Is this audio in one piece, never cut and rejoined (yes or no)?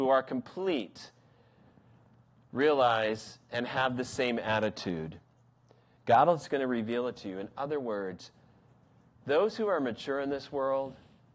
yes